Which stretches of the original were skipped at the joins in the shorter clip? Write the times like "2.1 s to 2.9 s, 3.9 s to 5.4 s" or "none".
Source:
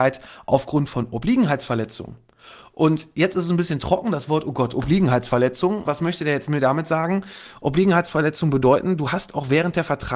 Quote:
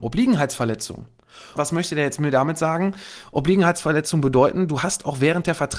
2.6 s to 5.8 s